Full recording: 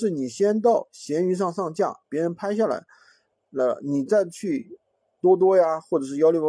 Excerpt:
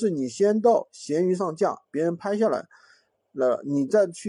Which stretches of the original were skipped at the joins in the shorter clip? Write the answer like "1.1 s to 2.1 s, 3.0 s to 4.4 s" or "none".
1.4 s to 1.5 s